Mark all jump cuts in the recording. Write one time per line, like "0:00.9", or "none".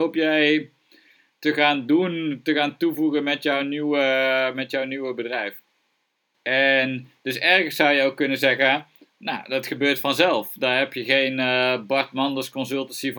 0:06.3